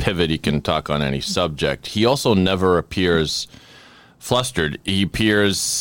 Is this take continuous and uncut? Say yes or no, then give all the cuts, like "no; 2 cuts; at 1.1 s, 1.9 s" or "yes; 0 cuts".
yes; 0 cuts